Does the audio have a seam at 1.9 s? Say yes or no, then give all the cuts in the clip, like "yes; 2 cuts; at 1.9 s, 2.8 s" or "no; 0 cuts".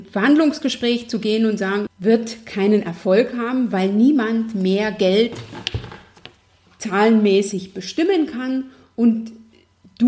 yes; 1 cut; at 1.9 s